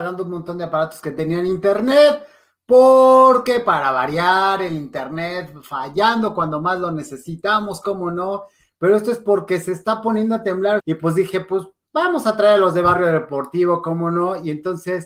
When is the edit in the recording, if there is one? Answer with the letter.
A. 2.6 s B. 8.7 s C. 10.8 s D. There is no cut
C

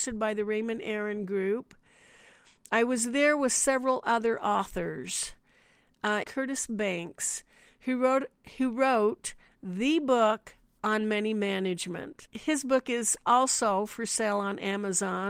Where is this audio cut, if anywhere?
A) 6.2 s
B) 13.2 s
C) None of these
A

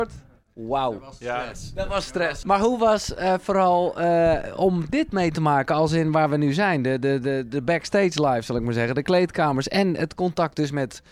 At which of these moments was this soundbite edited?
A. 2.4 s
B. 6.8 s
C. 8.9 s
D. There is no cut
A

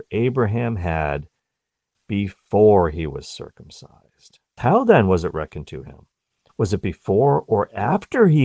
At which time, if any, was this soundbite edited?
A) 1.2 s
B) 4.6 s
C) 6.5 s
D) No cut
B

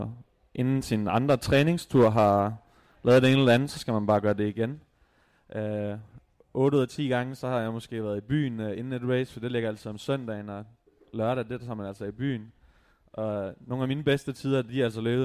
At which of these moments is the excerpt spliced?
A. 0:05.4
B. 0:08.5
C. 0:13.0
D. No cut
D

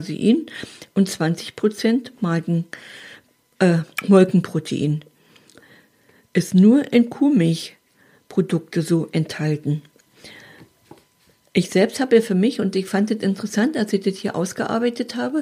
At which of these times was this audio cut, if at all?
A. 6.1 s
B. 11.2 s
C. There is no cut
C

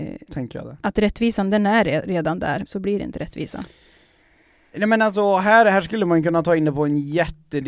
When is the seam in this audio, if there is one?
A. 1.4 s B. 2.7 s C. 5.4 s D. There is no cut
B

